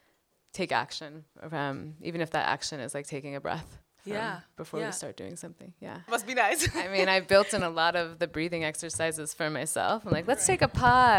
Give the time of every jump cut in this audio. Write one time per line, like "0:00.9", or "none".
0:06.1